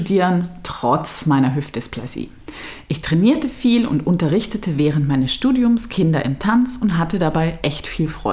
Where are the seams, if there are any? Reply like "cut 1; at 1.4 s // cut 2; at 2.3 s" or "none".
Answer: none